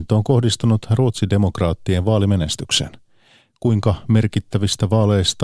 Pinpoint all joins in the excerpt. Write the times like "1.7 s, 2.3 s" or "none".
none